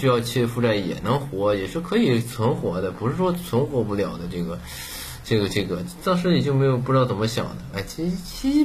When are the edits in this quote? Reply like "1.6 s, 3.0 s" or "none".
7.7 s